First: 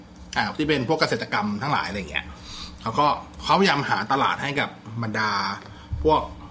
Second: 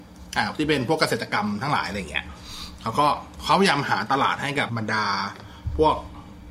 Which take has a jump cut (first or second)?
second